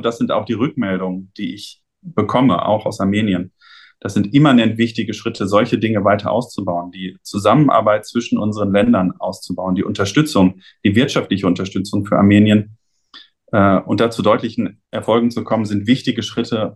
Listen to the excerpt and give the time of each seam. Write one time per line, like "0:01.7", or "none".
none